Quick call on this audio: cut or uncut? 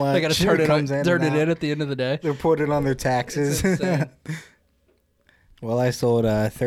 uncut